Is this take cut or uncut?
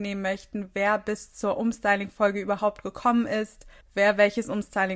cut